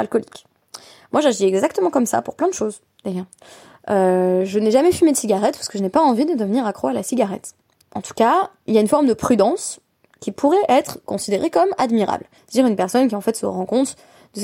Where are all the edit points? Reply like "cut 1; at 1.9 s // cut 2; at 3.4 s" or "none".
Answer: cut 1; at 7.8 s // cut 2; at 12.4 s